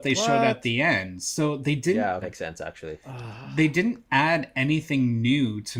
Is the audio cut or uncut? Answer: cut